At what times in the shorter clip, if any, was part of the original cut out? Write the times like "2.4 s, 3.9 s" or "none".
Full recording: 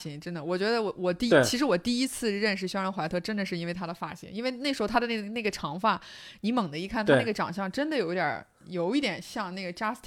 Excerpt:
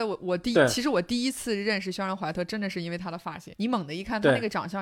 3.5 s